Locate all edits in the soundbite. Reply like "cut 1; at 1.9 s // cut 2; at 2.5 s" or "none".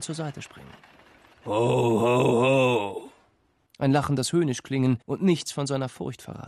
cut 1; at 3.7 s // cut 2; at 5.0 s